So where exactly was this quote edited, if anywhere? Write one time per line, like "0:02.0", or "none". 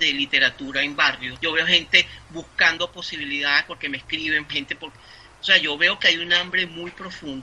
0:01.4
0:04.5